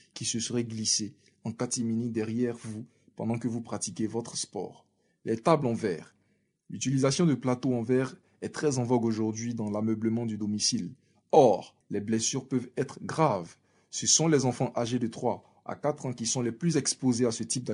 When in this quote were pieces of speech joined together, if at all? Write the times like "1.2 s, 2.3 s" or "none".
11.8 s